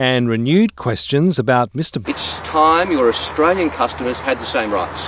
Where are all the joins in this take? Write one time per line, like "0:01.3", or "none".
0:02.0

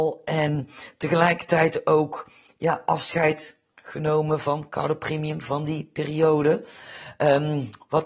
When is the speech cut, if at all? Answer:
none

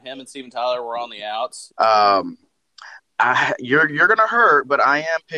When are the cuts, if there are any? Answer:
0:01.7
0:03.0

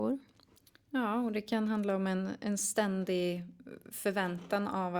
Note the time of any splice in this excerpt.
none

